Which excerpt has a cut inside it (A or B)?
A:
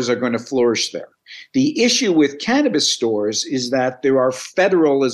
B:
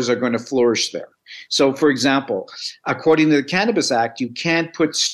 B